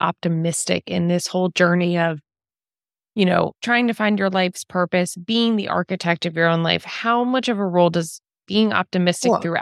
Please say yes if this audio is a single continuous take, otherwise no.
no